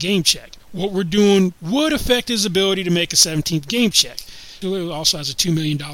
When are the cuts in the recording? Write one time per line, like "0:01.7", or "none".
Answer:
0:01.6
0:04.6